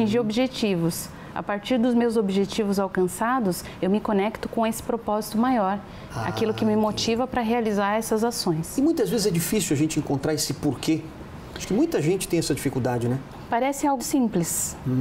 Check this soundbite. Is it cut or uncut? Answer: cut